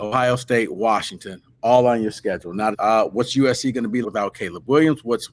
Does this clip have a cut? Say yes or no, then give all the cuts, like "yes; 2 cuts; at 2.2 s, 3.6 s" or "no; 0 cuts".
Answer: yes; 2 cuts; at 2.7 s, 4.0 s